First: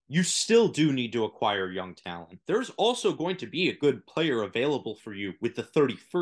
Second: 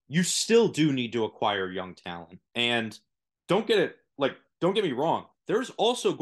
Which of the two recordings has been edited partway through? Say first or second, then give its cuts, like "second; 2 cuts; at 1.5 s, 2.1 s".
first; 1 cut; at 2.4 s